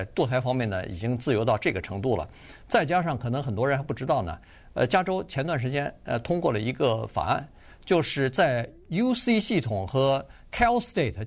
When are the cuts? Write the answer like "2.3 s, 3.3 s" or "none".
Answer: none